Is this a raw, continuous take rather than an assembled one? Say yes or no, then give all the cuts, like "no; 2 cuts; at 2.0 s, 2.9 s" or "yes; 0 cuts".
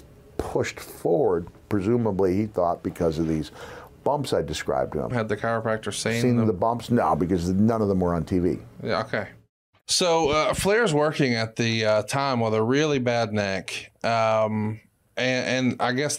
no; 1 cut; at 5.1 s